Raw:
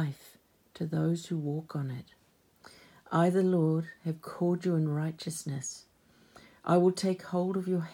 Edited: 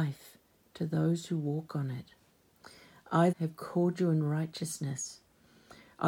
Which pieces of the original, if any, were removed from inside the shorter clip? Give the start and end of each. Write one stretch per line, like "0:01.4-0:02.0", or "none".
0:03.3-0:04.0